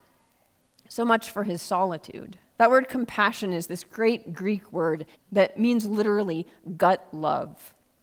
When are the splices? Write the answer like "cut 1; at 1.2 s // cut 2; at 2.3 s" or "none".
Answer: cut 1; at 2.6 s // cut 2; at 5.1 s

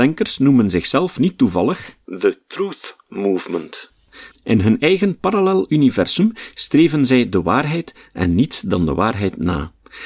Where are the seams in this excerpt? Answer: cut 1; at 4.3 s

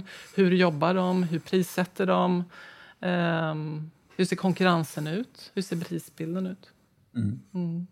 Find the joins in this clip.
none

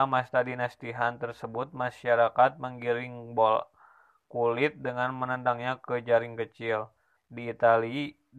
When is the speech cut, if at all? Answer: cut 1; at 7.2 s

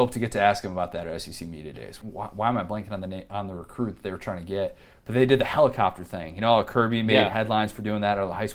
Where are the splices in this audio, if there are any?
cut 1; at 2.0 s

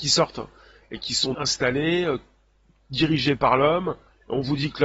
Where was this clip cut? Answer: cut 1; at 1.3 s

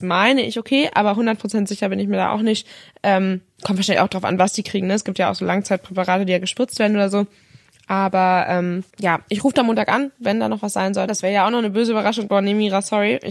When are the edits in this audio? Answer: cut 1; at 8.9 s // cut 2; at 11.1 s // cut 3; at 12.3 s

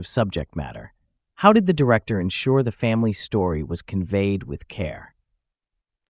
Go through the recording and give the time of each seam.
none

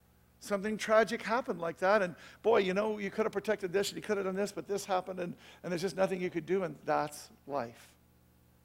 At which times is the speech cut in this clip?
none

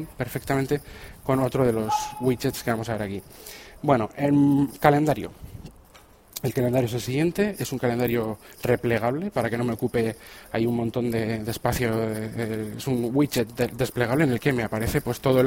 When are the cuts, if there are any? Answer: none

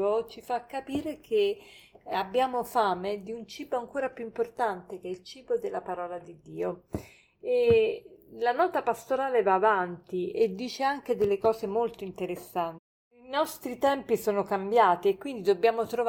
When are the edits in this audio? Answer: none

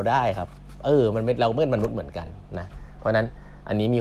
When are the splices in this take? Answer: none

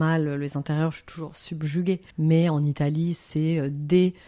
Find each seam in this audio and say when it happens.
cut 1; at 2.1 s

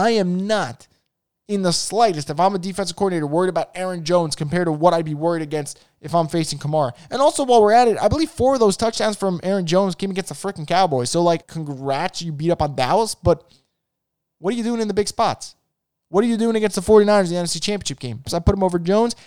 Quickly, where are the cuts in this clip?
cut 1; at 11.4 s // cut 2; at 18.3 s

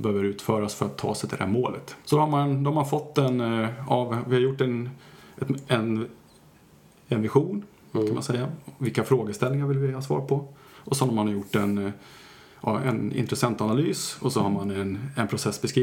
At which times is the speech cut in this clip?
cut 1; at 2.0 s

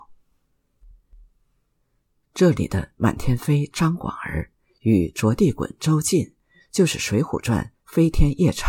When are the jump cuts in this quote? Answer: none

